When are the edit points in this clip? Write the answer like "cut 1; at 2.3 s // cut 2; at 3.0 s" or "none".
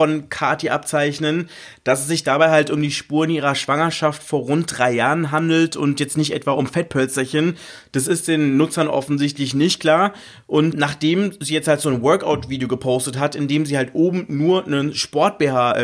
cut 1; at 10.7 s